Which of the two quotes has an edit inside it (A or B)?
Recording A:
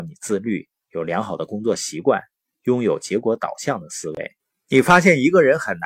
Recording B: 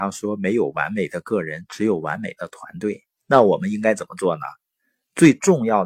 B